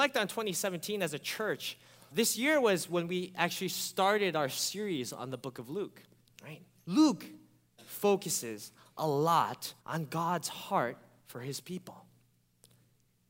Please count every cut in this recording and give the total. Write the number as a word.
three